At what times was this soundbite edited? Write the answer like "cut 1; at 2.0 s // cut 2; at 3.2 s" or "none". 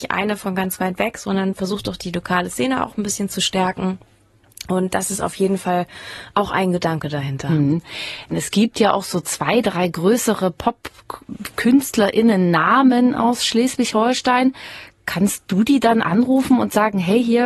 cut 1; at 8.3 s // cut 2; at 16.0 s